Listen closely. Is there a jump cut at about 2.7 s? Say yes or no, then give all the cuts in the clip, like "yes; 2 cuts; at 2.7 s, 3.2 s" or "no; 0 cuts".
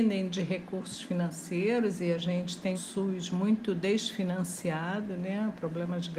yes; 1 cut; at 2.7 s